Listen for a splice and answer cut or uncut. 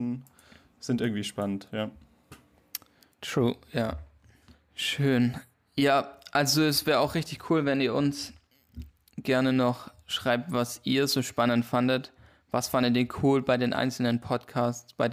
uncut